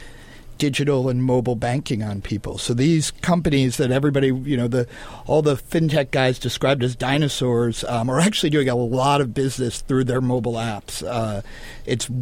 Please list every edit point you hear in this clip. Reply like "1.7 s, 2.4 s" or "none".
none